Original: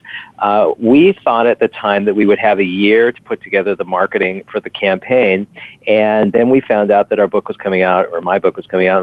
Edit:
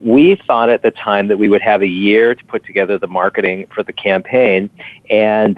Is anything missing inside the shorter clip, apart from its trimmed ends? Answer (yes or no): no